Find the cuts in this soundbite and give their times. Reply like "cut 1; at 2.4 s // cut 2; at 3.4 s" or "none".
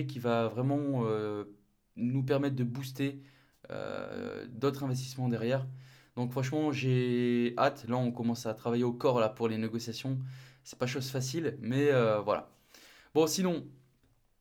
none